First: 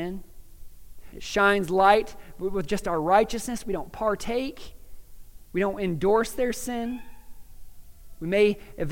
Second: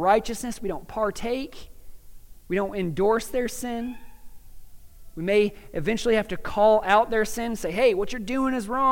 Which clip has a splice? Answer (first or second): first